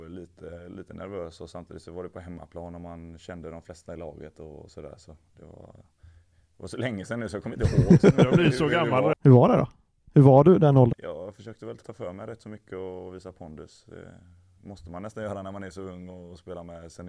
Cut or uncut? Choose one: cut